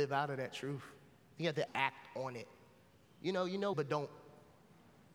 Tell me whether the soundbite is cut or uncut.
cut